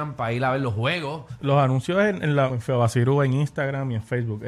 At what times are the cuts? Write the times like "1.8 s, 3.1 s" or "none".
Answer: 1.4 s, 2.5 s

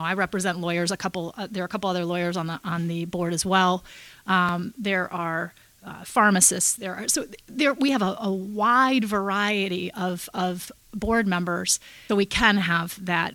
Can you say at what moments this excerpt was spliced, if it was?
12.1 s

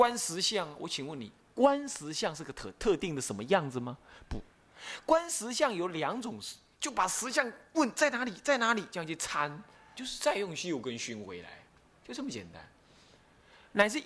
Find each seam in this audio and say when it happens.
6.7 s, 9.9 s

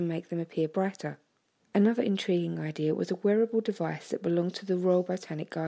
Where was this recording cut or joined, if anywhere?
1.6 s

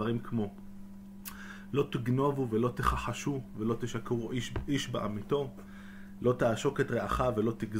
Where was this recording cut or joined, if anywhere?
none

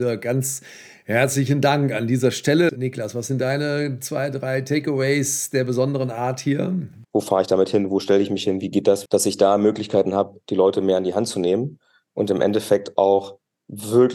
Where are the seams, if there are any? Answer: 2.7 s, 7.0 s, 9.1 s

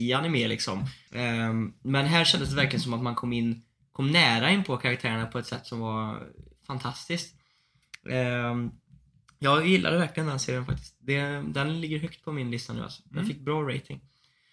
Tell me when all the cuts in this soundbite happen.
1.1 s

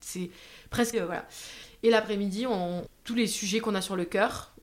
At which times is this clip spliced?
0.9 s, 2.9 s

